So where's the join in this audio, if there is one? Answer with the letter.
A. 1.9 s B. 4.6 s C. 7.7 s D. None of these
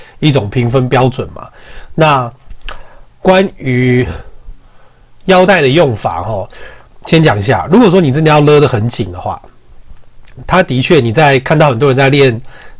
D